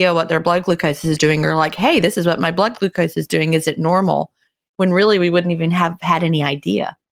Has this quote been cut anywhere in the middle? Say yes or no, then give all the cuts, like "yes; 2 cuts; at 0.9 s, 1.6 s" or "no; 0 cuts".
no; 0 cuts